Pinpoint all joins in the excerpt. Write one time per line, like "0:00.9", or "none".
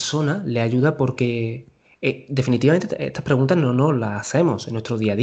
none